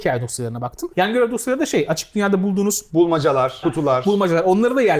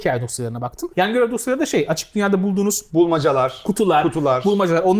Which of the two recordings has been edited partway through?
first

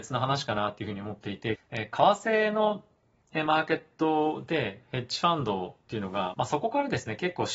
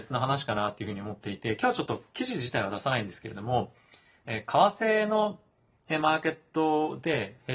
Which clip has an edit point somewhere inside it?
first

